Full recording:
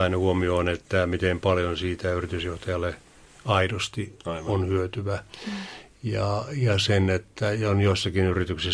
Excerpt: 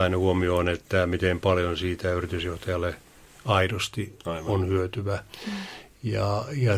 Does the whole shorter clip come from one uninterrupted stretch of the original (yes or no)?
yes